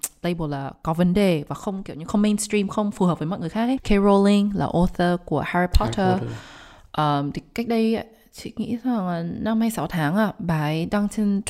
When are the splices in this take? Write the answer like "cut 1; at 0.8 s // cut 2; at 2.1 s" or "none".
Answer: cut 1; at 3.8 s